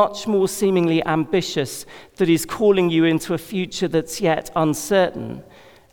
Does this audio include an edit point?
no; 0 cuts

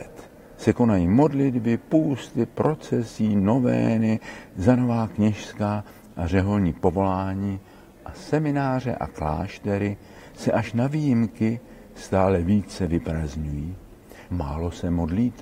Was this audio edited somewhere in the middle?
yes; 1 cut; at 14.3 s

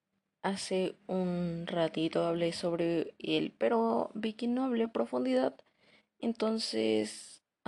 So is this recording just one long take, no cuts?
no; 1 cut; at 4.8 s

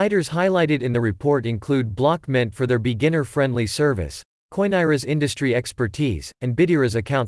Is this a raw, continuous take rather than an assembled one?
yes; 0 cuts

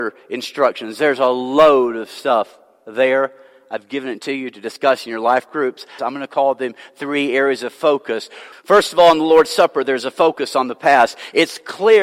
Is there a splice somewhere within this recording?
yes; 2 cuts; at 6.0 s, 8.5 s

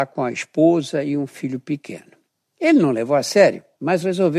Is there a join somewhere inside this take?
yes; 1 cut; at 2.5 s

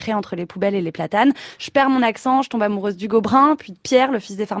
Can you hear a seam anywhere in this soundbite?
no; 0 cuts

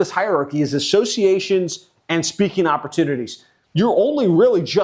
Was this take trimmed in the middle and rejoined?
yes; 1 cut; at 3.7 s

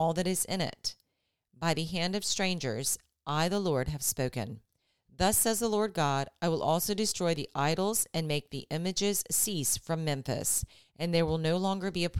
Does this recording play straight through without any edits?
yes; 0 cuts

